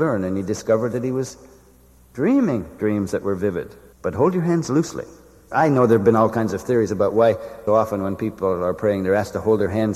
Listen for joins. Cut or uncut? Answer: cut